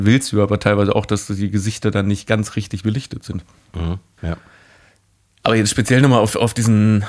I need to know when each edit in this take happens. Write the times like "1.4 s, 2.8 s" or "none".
4.2 s